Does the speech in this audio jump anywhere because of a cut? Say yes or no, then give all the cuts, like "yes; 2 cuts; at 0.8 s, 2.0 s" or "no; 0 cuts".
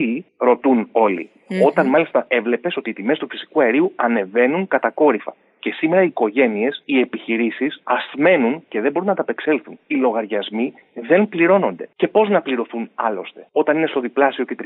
no; 0 cuts